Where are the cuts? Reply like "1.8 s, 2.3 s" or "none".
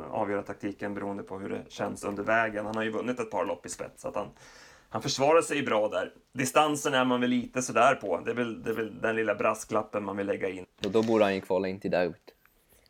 10.6 s